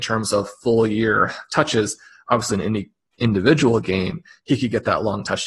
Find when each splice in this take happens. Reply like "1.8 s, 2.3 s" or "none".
none